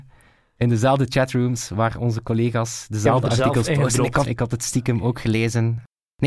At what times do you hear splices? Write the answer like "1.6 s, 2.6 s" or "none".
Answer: 4.3 s